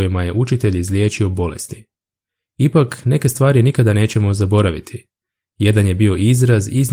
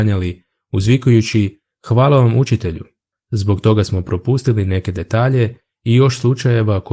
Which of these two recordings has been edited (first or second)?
second